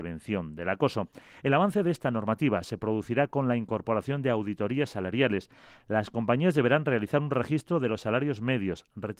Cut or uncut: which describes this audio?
uncut